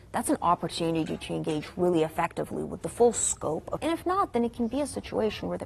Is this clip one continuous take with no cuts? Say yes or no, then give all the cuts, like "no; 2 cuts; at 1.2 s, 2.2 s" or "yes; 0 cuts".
no; 1 cut; at 3.8 s